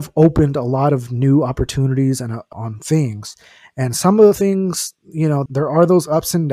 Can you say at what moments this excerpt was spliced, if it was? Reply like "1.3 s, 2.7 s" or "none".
2.5 s, 5.5 s